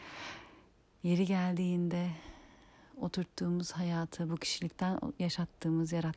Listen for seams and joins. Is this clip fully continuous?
yes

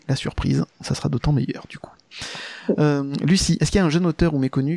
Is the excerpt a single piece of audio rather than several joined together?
yes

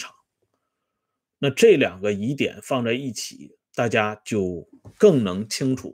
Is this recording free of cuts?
yes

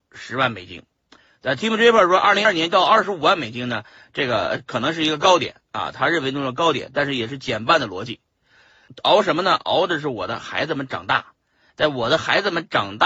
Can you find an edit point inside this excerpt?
yes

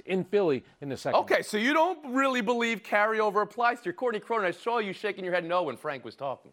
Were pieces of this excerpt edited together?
no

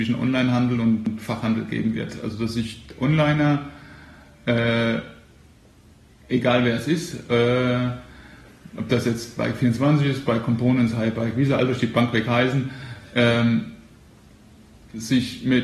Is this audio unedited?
yes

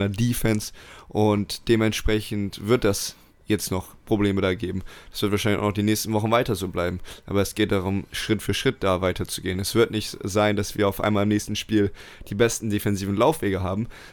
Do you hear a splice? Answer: no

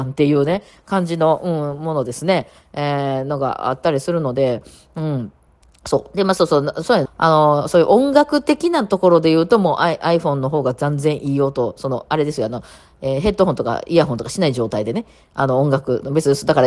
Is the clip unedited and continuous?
no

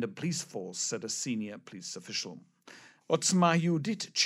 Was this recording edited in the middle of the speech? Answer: yes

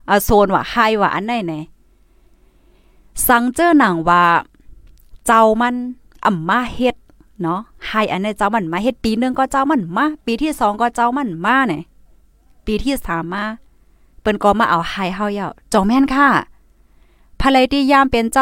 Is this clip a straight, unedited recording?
yes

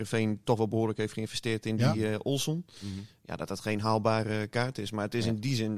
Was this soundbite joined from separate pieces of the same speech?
no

